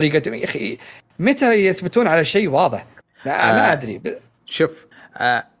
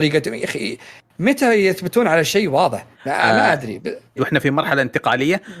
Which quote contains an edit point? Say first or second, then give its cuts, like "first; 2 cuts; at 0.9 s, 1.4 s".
second; 2 cuts; at 2.9 s, 4.2 s